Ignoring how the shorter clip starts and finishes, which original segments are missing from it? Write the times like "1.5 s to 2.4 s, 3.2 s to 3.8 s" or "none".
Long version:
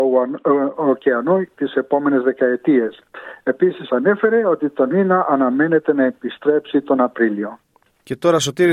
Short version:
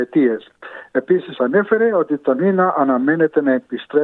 none